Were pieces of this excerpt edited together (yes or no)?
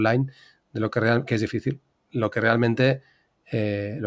no